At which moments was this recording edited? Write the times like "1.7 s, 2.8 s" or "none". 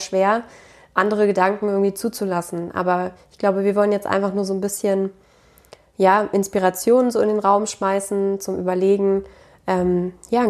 none

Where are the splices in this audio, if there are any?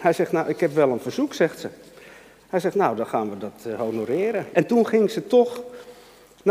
4.5 s

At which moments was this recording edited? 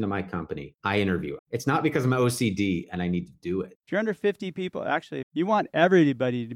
1.4 s, 3.8 s, 5.2 s

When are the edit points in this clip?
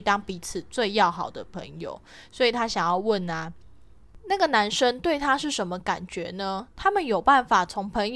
none

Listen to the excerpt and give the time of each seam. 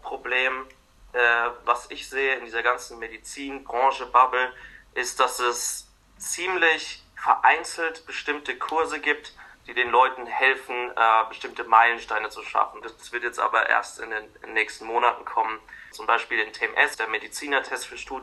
12.8 s, 15.9 s, 16.9 s

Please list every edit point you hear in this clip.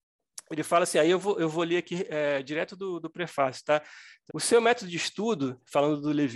4.3 s

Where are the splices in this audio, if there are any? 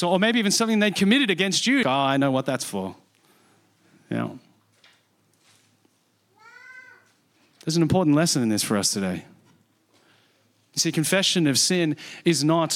1.8 s

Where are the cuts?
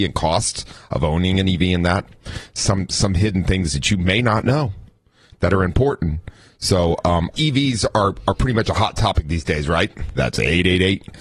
7.3 s, 10.2 s

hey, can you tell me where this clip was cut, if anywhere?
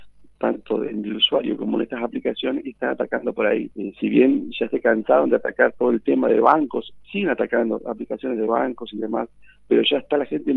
3.7 s

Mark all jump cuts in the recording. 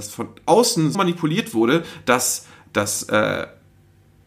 0.9 s

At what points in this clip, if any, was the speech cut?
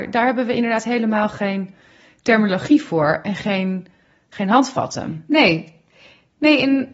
none

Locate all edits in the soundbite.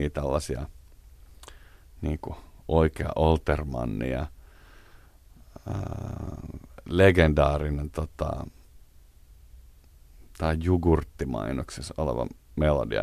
none

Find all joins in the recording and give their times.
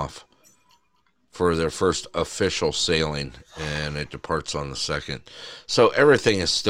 none

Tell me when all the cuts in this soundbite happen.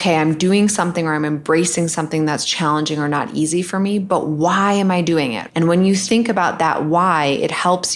5.5 s

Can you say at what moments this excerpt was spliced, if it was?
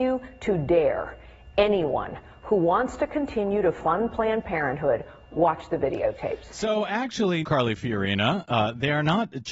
7.4 s

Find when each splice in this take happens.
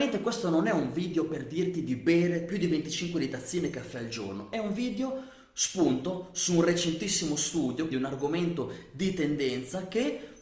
7.9 s

